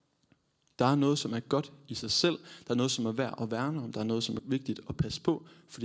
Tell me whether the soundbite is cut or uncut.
cut